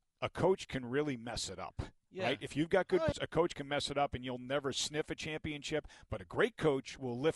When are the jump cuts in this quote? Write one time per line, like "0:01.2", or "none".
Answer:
0:03.1